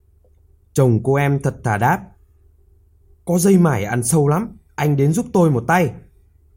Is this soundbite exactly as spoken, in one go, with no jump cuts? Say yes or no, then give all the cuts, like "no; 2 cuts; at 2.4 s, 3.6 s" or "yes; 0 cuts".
yes; 0 cuts